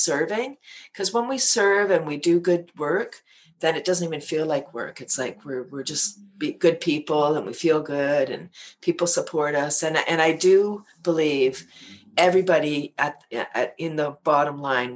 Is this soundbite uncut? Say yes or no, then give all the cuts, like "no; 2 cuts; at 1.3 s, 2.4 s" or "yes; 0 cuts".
yes; 0 cuts